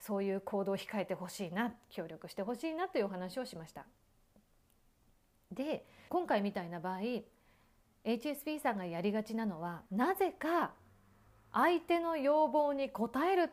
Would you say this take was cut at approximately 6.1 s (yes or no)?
yes